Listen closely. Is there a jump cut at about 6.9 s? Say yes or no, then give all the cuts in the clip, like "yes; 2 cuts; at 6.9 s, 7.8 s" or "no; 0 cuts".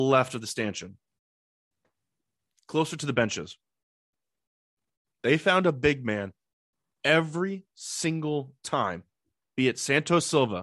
no; 0 cuts